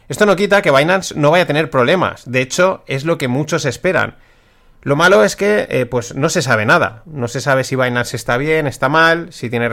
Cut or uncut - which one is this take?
uncut